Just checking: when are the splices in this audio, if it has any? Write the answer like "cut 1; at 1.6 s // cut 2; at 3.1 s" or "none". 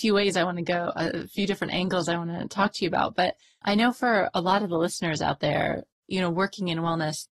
none